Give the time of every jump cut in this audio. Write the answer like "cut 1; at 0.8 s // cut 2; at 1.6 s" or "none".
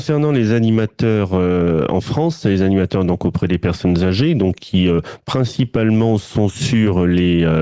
none